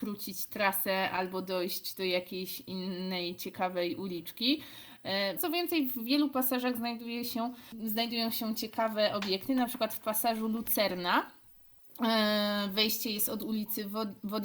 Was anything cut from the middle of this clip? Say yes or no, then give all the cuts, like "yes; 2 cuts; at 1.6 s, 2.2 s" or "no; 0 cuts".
yes; 1 cut; at 5.4 s